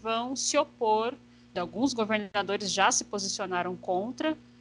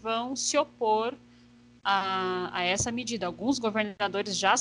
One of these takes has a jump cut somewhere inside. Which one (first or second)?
first